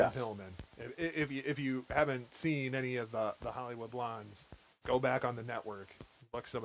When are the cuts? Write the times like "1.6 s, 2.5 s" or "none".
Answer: 4.8 s